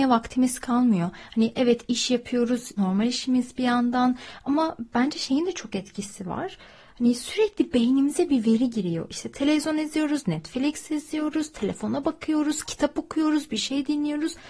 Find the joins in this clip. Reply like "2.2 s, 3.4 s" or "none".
2.8 s